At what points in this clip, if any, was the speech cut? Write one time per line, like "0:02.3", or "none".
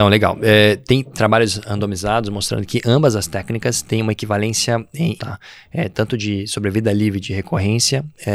0:05.2